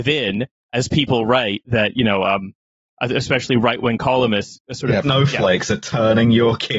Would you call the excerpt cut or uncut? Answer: cut